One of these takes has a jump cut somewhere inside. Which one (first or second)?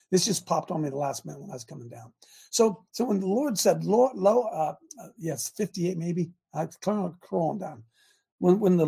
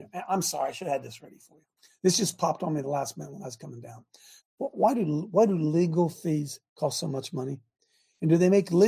second